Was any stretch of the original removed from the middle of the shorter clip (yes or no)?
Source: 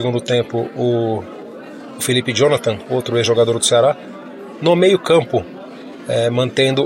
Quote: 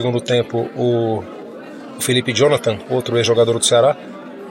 no